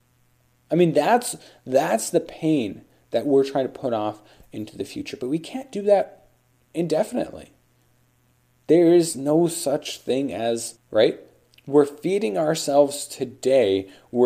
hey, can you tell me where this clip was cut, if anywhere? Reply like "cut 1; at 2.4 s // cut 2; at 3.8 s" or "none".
cut 1; at 10.8 s